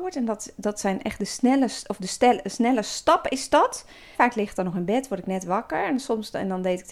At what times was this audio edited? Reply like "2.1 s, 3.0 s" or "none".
4.1 s